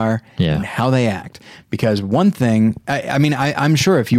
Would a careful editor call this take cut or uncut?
uncut